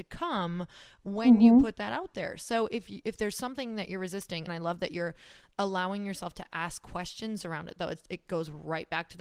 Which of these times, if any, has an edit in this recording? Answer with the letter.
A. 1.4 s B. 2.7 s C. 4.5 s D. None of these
C